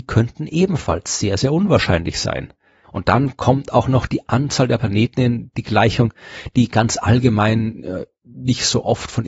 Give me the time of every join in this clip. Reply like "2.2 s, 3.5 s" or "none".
2.8 s